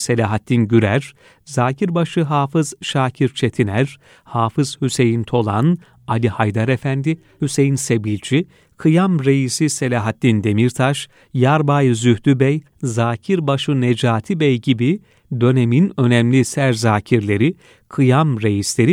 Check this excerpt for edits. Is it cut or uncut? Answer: cut